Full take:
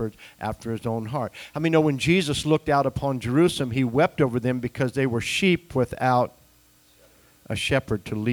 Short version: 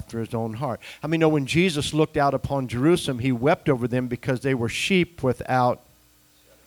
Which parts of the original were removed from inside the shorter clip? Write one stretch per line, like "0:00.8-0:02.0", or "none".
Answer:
none

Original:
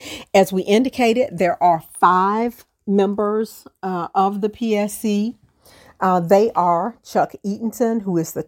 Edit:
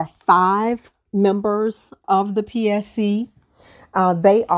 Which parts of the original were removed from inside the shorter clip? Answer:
0:03.8-0:04.1

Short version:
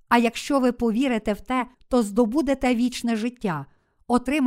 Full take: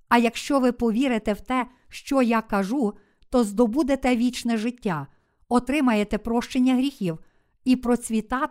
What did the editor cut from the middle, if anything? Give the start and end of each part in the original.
0:01.7-0:03.2

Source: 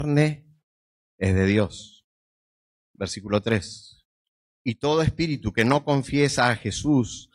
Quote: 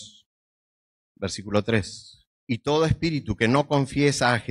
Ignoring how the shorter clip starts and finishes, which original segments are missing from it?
0:04.1-0:04.5

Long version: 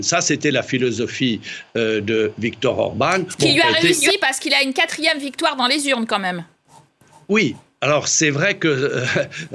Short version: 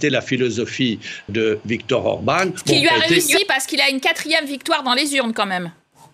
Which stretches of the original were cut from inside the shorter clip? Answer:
0:01.7-0:02.0

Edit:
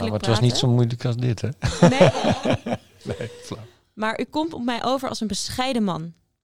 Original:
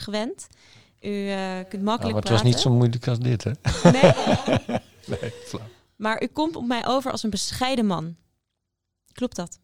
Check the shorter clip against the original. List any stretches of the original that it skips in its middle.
none

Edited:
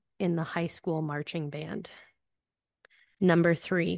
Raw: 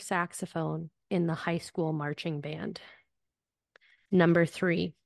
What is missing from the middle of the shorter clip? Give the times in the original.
none

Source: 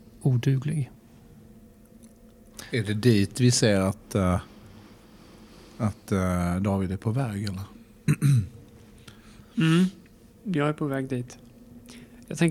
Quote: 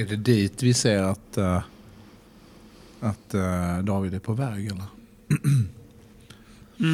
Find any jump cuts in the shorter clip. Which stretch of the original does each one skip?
none

